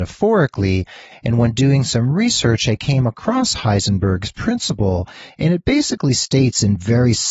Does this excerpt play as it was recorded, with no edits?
no; 1 cut; at 1.1 s

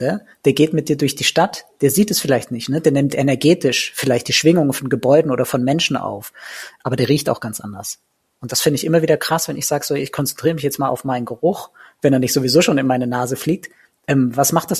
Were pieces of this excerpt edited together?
no; 0 cuts

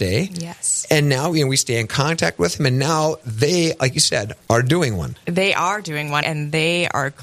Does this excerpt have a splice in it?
yes; 2 cuts; at 4.4 s, 6.2 s

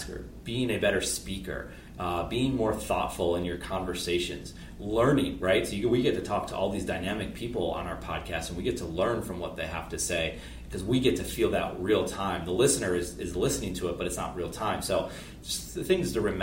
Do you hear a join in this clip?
no; 0 cuts

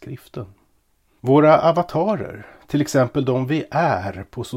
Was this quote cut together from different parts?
yes; 1 cut; at 1.2 s

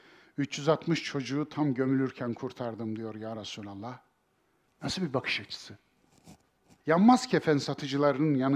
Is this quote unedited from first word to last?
no; 2 cuts; at 4.7 s, 6.8 s

